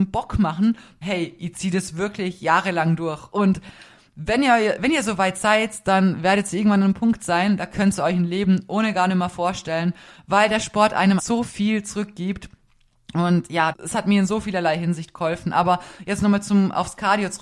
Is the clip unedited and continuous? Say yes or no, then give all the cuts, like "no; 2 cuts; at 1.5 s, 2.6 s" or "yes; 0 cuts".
no; 3 cuts; at 1.0 s, 11.2 s, 13.7 s